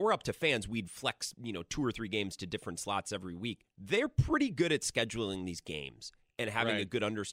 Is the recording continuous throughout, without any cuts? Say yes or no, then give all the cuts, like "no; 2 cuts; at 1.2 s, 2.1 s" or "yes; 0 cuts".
yes; 0 cuts